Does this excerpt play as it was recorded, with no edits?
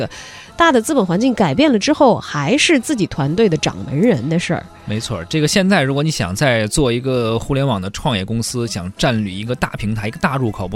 yes; 0 cuts

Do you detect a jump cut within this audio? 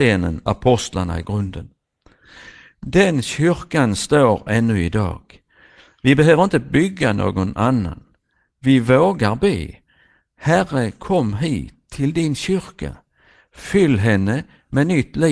no; 0 cuts

